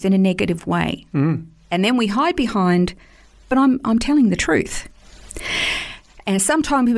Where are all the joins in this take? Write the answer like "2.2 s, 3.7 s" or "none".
none